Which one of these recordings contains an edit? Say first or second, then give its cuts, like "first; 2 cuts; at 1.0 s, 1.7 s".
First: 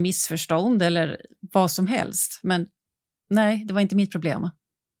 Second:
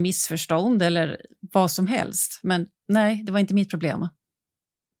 second; 1 cut; at 2.8 s